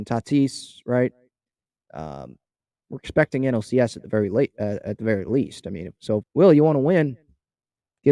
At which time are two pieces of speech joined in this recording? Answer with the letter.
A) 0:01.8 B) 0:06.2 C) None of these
B